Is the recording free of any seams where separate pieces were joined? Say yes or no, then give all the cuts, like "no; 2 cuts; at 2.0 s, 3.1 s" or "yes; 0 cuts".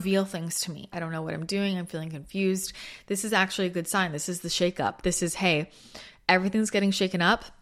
no; 1 cut; at 0.9 s